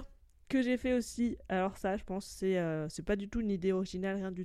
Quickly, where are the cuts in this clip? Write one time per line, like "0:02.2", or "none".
none